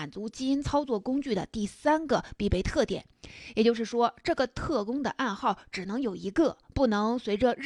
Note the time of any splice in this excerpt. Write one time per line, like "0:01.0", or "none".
none